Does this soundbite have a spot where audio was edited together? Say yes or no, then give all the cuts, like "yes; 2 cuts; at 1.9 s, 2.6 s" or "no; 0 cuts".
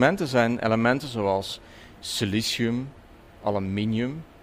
no; 0 cuts